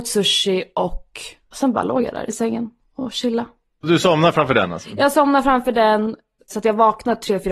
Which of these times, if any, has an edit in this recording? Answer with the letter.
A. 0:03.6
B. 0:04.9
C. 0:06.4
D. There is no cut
C